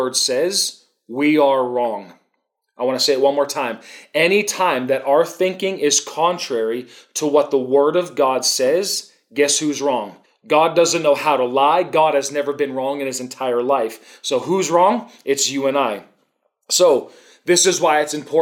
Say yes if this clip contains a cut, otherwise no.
yes